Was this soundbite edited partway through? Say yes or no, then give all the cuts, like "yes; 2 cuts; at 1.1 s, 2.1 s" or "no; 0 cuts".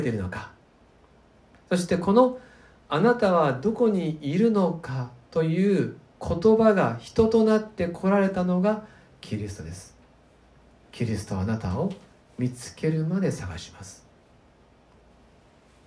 no; 0 cuts